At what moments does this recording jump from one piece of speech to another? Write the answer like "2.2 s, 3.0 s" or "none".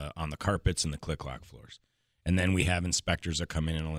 none